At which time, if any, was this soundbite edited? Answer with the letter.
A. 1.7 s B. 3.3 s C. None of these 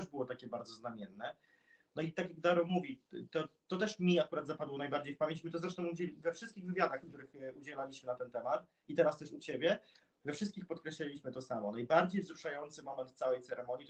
C